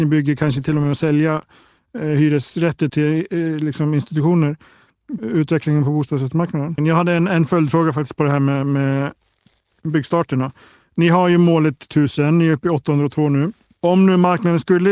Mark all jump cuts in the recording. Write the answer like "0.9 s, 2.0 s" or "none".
2.9 s, 5.2 s, 6.8 s